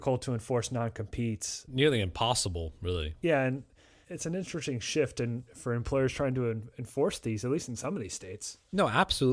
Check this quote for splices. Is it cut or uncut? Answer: uncut